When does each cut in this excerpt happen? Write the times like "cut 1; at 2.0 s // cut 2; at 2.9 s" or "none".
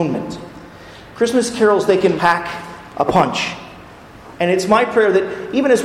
cut 1; at 2.2 s // cut 2; at 4.3 s